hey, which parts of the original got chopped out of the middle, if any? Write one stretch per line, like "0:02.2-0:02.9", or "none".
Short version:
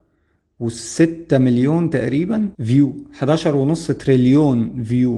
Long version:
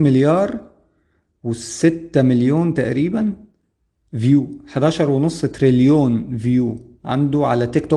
0:03.4-0:04.1